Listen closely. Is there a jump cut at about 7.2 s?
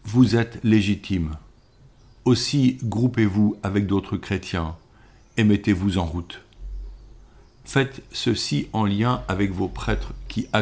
no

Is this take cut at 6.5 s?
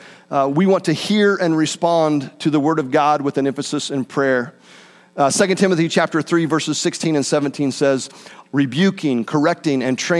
no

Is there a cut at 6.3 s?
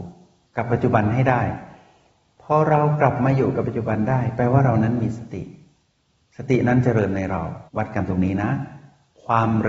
no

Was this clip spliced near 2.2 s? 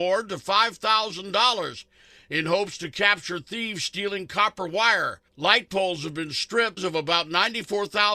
no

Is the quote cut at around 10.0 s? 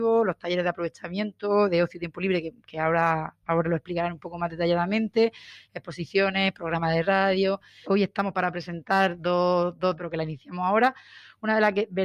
yes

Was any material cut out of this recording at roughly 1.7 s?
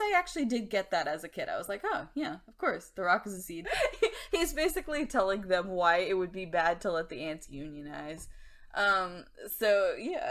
no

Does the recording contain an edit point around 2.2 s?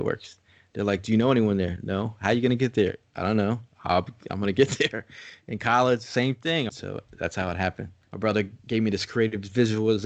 no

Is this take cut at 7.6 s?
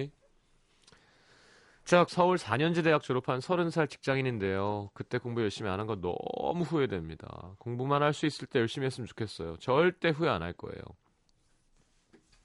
no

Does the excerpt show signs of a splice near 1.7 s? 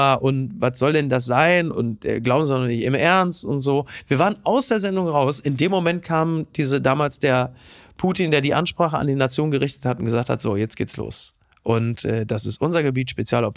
yes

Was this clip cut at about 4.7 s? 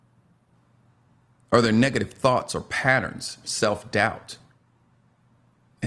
no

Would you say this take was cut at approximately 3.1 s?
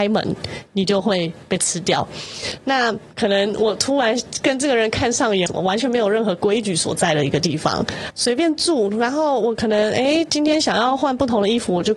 yes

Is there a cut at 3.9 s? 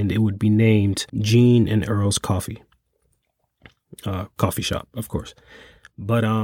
no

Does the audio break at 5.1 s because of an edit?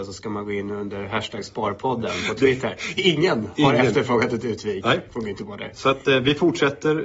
no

